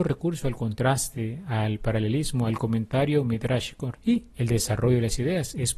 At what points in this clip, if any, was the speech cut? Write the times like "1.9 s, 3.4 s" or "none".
3.9 s